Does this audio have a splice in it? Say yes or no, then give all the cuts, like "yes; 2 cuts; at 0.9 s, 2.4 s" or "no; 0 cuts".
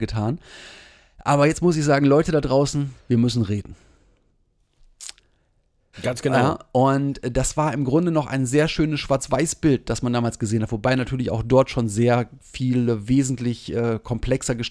yes; 1 cut; at 5.9 s